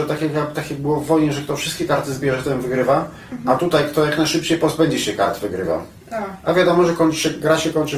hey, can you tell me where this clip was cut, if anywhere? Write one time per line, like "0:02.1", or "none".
none